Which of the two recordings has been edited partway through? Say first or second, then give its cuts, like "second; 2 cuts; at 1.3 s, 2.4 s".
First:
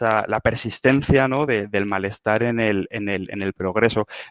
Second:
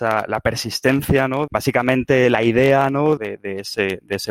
second; 2 cuts; at 1.5 s, 3.2 s